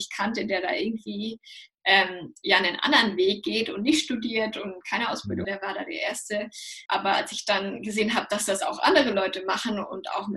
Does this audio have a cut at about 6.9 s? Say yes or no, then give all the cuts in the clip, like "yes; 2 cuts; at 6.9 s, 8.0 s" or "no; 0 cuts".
yes; 2 cuts; at 5.4 s, 6.9 s